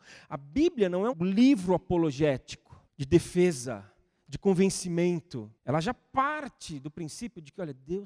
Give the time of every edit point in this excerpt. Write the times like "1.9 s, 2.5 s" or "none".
1.1 s, 2.9 s, 5.6 s